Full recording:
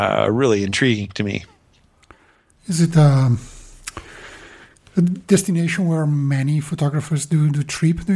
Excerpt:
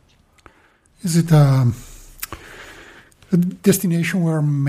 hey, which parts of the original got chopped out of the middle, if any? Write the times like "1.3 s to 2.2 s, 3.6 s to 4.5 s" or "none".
none